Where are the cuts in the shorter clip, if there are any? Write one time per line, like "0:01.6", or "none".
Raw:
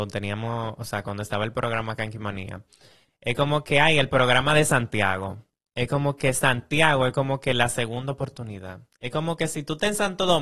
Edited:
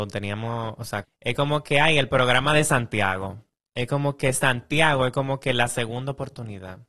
0:01.0